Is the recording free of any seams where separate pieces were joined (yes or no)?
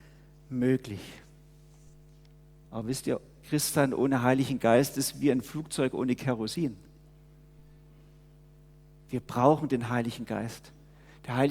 no